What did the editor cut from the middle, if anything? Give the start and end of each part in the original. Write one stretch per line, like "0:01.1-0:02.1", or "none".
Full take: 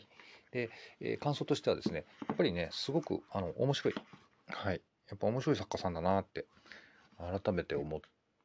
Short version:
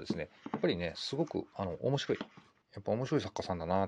0:04.4-0:05.0